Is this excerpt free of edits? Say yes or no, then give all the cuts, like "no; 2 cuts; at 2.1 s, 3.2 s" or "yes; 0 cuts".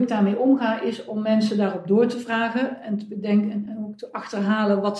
no; 1 cut; at 3.7 s